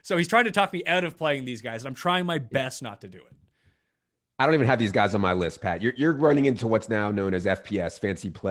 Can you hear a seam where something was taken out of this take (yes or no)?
yes